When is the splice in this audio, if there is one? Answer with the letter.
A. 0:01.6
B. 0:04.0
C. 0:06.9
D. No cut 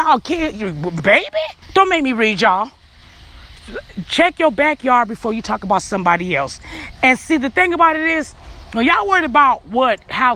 A